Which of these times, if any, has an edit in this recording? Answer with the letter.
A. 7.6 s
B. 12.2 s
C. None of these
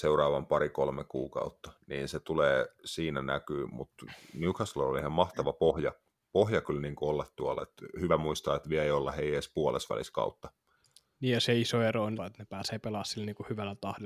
B